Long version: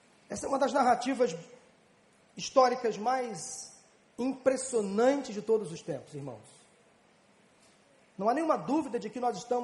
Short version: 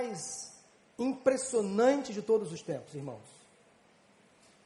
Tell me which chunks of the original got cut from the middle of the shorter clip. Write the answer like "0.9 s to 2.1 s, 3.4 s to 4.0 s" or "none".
none